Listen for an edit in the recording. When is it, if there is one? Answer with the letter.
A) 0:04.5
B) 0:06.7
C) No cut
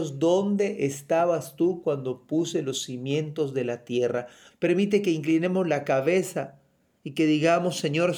A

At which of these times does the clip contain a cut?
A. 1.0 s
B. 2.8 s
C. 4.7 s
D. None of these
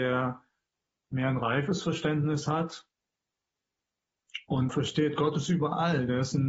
C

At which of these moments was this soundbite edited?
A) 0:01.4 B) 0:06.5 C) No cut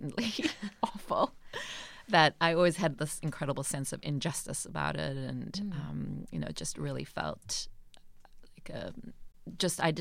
C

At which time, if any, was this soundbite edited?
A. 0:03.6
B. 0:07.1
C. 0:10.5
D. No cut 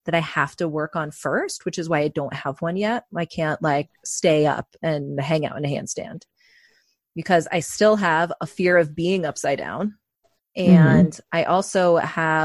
D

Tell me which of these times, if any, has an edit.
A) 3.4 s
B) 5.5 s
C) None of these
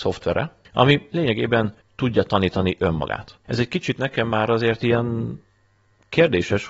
A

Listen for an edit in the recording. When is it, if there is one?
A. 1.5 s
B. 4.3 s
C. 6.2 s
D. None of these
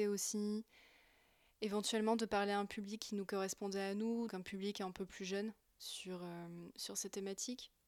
B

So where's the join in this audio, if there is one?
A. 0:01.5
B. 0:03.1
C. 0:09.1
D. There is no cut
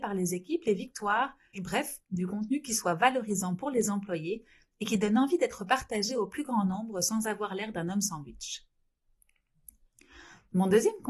A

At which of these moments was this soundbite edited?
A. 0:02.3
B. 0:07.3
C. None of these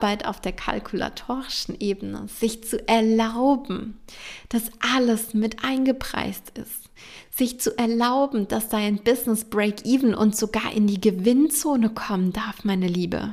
C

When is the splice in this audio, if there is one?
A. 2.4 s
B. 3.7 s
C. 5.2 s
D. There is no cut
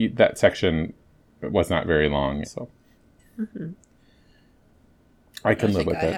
A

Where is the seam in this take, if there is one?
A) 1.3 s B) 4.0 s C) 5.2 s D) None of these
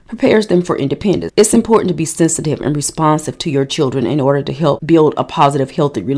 A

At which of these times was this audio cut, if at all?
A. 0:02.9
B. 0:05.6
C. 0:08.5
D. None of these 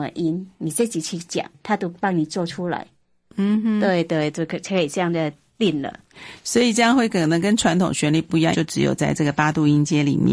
C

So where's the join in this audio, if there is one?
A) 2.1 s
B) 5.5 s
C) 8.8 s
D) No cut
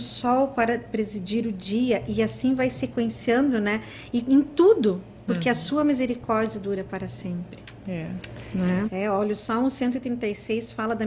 C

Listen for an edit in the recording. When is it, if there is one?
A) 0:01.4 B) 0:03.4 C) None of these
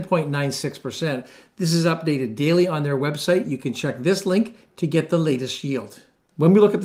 C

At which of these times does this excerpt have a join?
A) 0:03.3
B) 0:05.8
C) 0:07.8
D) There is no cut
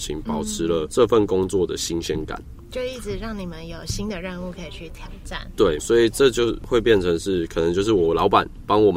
B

